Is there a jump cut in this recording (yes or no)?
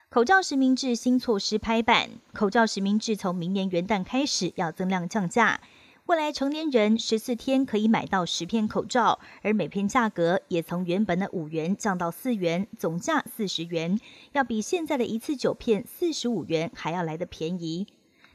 no